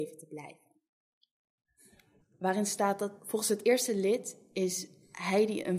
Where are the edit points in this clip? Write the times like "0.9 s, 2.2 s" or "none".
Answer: 2.2 s